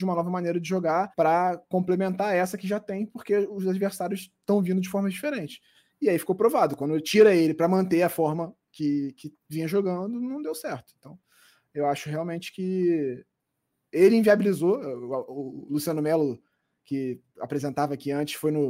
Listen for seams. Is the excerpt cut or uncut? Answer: cut